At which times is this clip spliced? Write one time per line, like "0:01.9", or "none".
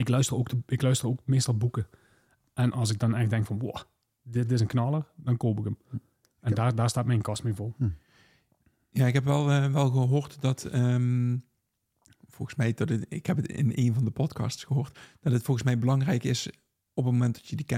none